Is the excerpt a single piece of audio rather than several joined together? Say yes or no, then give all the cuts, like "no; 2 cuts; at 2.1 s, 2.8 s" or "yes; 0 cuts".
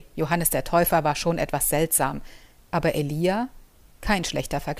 yes; 0 cuts